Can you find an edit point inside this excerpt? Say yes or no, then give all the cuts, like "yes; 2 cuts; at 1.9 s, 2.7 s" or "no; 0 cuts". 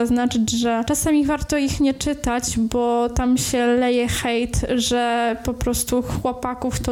no; 0 cuts